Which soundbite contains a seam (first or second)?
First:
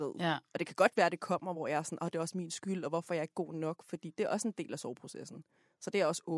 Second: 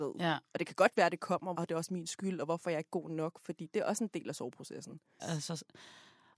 second